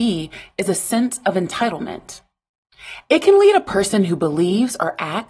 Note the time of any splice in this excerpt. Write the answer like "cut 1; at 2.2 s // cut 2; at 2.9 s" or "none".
cut 1; at 3.0 s